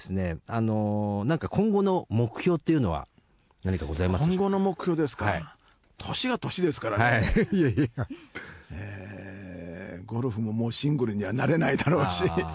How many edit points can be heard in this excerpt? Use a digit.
0